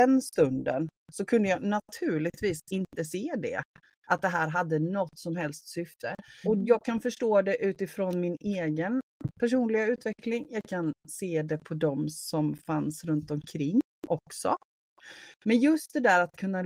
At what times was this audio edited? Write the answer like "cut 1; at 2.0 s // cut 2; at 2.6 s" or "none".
cut 1; at 6.4 s